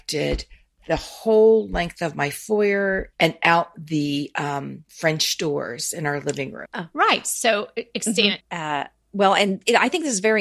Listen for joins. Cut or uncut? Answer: cut